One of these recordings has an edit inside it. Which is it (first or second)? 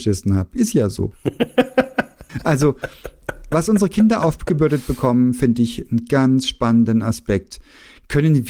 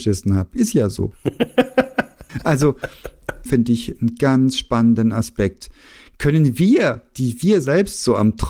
second